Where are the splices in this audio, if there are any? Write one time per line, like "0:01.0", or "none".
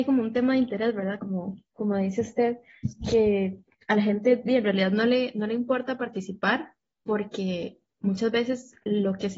none